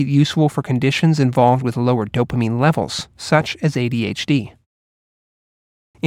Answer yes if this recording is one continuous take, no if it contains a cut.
yes